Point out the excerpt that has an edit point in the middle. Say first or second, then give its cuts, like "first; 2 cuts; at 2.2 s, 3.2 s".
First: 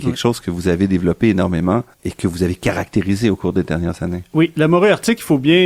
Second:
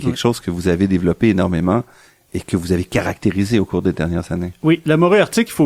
first; 1 cut; at 1.9 s